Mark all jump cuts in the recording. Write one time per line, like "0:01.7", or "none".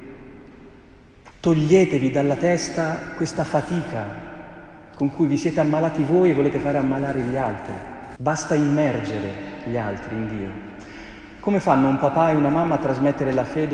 0:01.3
0:08.2